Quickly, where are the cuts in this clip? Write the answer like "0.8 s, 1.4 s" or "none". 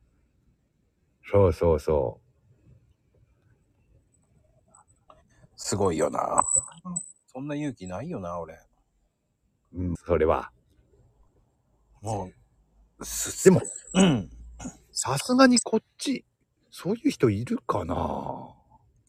10.0 s